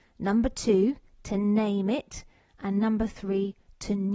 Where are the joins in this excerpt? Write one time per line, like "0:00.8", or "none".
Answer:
none